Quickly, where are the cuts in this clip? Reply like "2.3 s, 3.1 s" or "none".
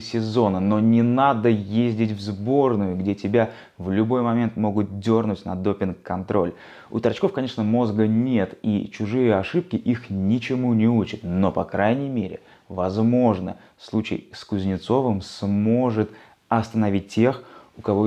none